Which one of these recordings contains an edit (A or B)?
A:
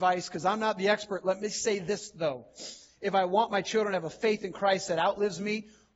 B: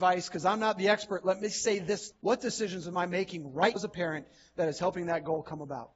B